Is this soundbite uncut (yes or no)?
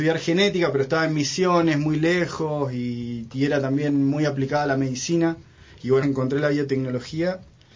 no